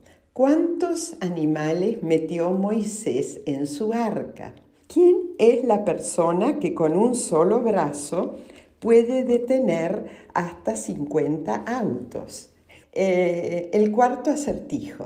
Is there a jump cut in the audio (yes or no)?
yes